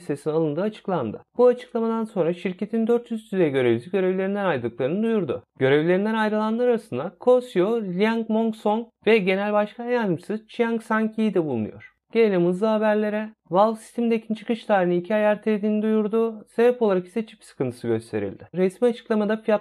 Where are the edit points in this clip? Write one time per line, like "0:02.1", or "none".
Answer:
0:18.5